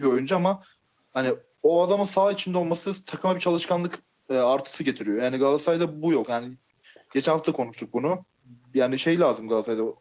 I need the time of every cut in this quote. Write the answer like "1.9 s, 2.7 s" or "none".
none